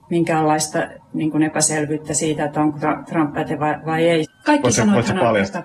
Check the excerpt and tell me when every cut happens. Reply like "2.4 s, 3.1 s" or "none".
4.2 s

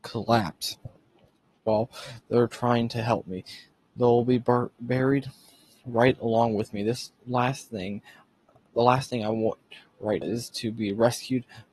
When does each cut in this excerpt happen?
10.2 s

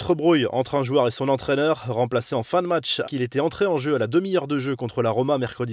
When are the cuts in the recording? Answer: 3.0 s

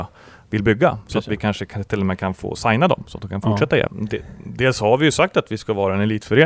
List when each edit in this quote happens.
3.9 s

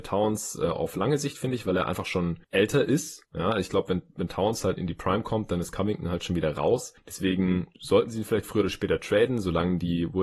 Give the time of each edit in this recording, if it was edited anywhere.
4.8 s

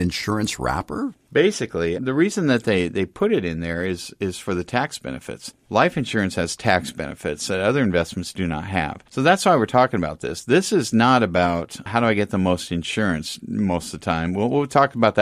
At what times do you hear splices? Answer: 1.9 s

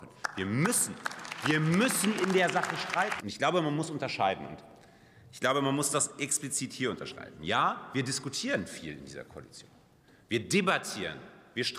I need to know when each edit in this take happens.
3.2 s

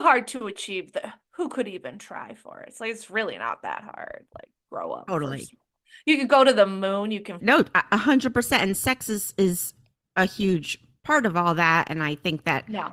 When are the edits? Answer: 7.4 s

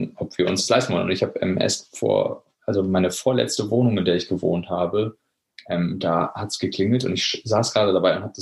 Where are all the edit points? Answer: none

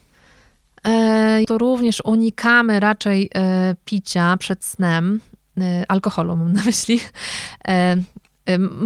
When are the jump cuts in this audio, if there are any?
1.4 s

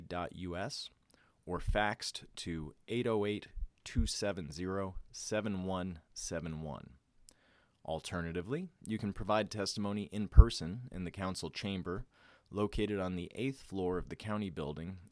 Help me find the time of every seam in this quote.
none

